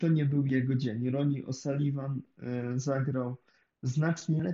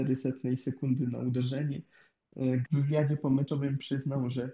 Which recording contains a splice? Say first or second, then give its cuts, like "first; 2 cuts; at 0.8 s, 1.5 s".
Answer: second; 1 cut; at 2.6 s